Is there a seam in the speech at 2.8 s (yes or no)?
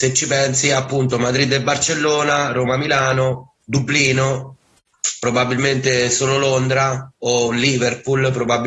no